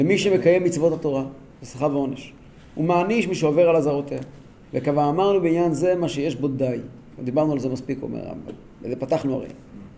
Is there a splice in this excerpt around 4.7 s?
yes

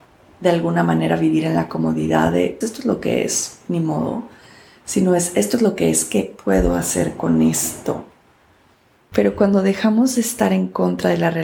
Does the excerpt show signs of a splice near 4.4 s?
no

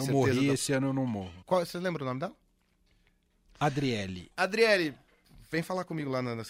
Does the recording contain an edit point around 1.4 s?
yes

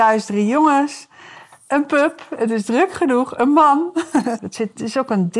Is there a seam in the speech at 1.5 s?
no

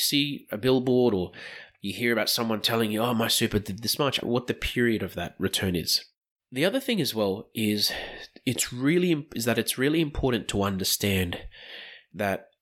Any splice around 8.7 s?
no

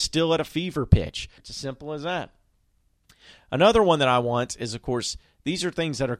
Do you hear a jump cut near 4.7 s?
no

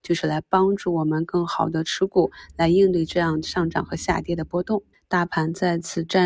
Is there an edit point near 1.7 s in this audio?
no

